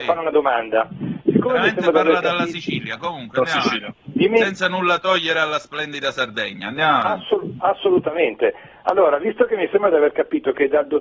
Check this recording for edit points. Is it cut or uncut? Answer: uncut